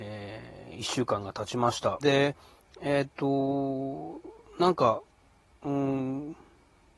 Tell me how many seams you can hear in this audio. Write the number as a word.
one